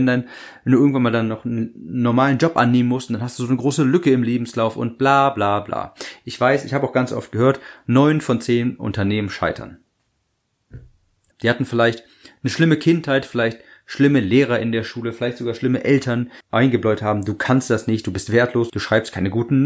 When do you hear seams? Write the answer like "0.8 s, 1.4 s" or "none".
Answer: 11.3 s, 16.4 s, 18.7 s